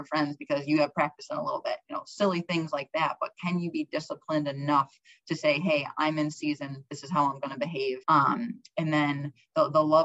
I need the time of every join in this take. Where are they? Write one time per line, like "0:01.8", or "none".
0:08.0